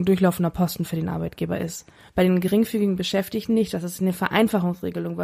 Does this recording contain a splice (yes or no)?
yes